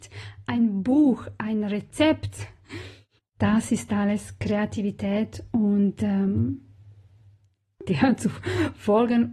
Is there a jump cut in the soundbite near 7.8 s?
yes; 2 cuts; at 3.2 s, 7.8 s

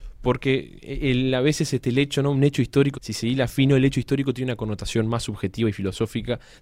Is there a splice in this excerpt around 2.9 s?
yes; 1 cut; at 2.9 s

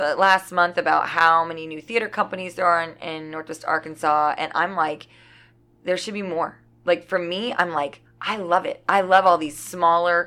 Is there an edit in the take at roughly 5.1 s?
no; 0 cuts

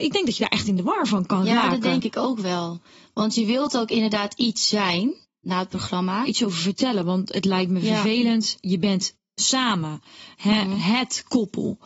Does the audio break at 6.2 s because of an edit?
yes; 1 cut; at 6.2 s

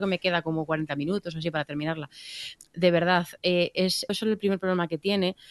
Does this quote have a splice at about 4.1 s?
yes; 2 cuts; at 2.6 s, 4.1 s

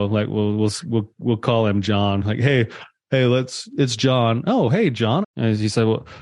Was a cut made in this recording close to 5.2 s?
yes; 1 cut; at 5.2 s

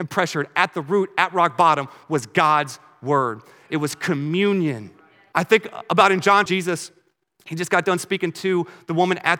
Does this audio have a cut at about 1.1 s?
no; 2 cuts; at 5.3 s, 6.5 s

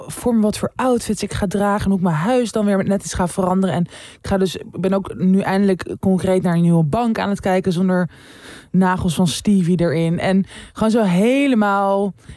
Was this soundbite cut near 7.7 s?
no; 0 cuts

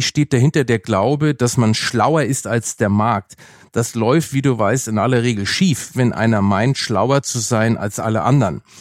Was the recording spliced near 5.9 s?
yes; 1 cut; at 5.9 s

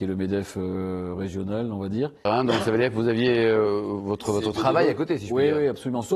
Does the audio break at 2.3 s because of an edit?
yes; 1 cut; at 2.3 s

